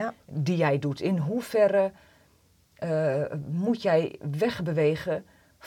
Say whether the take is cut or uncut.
uncut